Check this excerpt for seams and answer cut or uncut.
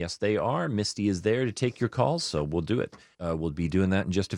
cut